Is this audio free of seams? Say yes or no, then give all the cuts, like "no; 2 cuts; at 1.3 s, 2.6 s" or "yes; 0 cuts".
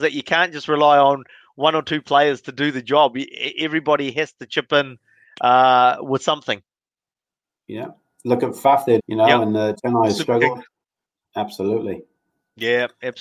no; 1 cut; at 9.0 s